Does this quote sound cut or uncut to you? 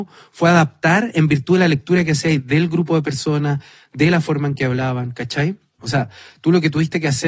cut